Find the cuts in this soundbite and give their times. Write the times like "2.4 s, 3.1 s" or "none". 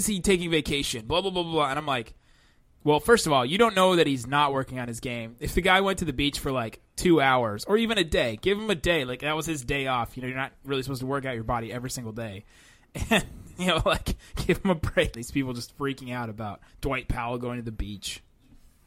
15.1 s, 16.7 s